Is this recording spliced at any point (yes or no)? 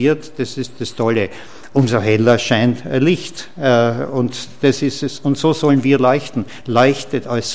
no